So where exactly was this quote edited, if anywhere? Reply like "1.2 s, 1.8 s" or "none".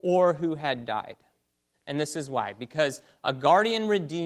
1.7 s